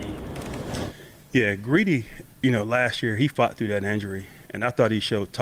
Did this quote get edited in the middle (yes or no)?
yes